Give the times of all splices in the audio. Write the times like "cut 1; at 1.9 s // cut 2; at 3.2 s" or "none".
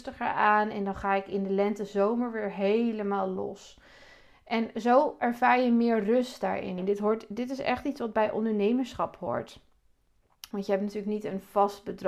cut 1; at 6.8 s // cut 2; at 10.5 s